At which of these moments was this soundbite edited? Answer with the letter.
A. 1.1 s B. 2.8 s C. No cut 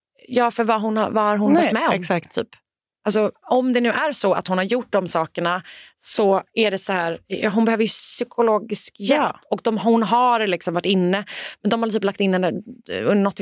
C